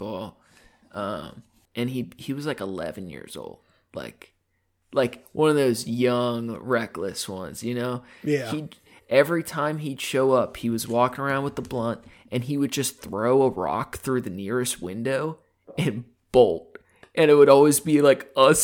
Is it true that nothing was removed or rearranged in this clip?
no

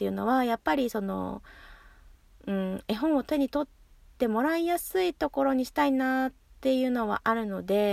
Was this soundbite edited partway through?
no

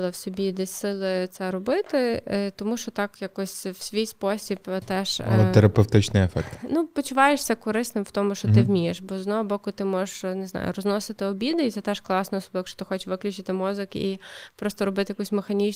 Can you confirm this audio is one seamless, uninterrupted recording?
yes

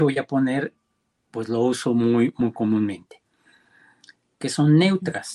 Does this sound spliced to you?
yes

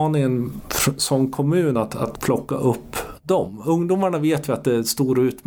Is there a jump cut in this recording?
no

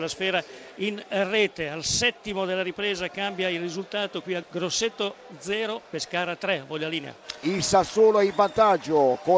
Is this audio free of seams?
no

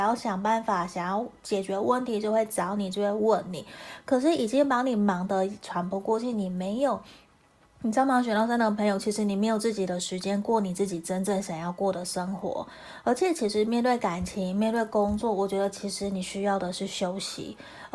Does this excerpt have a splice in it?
no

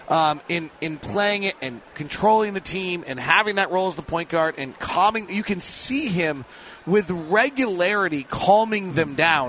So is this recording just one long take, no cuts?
yes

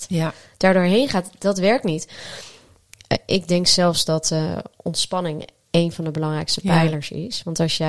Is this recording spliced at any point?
no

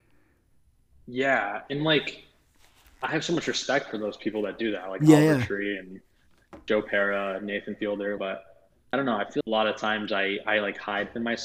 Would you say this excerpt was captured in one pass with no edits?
no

